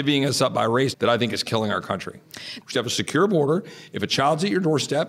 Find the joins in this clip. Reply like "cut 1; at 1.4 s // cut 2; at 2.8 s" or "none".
cut 1; at 0.9 s // cut 2; at 2.6 s